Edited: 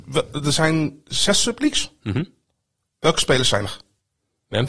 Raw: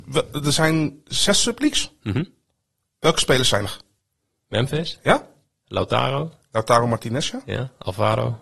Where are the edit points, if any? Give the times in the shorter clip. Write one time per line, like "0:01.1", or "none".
none